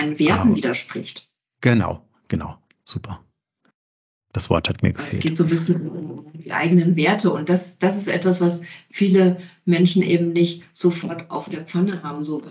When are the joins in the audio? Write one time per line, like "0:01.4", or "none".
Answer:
0:02.8